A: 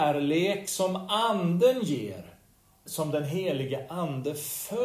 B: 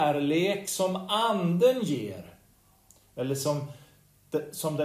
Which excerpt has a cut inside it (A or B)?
A